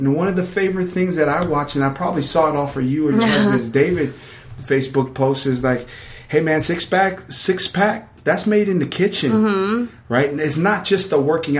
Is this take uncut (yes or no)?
yes